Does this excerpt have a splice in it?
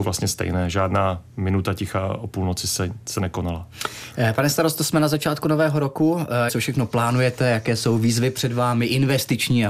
yes; 1 cut; at 6.5 s

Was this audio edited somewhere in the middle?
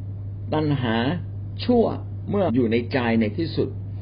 yes; 1 cut; at 2.5 s

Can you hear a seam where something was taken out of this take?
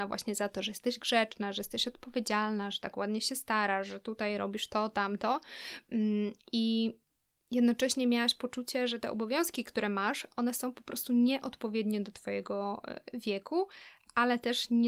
no; 0 cuts

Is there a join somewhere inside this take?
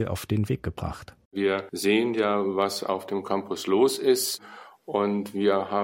yes; 1 cut; at 1.2 s

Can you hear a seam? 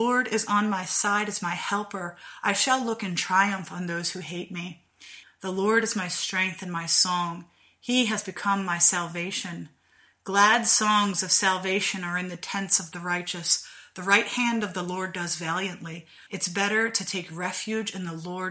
yes; 2 cuts; at 5.2 s, 16.3 s

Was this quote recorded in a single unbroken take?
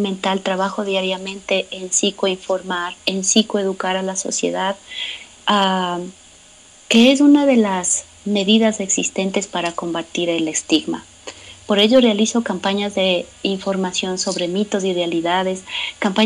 yes; 0 cuts

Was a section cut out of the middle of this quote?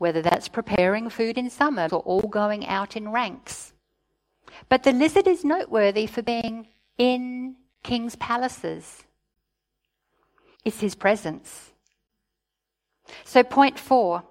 yes; 2 cuts; at 1.9 s, 10.5 s

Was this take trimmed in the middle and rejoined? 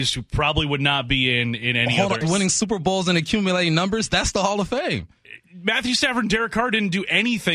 yes; 1 cut; at 2.2 s

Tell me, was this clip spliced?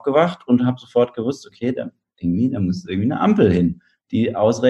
no; 0 cuts

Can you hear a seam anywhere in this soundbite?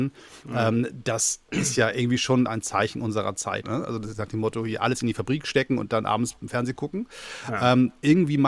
yes; 1 cut; at 3.6 s

